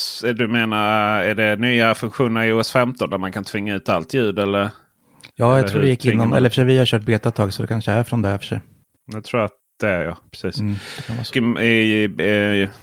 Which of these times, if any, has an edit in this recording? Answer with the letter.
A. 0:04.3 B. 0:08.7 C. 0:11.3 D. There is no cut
C